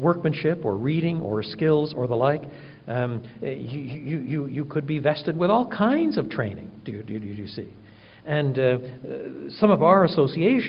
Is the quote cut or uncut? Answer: uncut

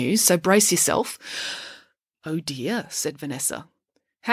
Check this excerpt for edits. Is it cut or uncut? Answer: cut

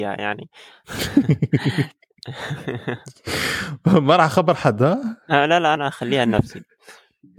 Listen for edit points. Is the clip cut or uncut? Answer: cut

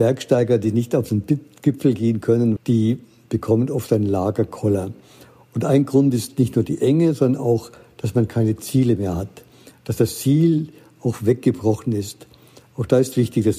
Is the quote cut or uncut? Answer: cut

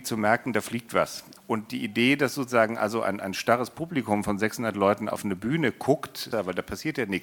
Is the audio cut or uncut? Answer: cut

